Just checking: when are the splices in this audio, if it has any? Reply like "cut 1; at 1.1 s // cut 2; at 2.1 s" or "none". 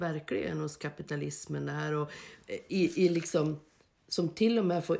none